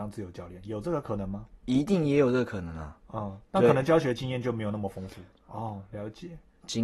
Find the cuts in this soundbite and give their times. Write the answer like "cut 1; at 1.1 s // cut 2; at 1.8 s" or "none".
cut 1; at 5.3 s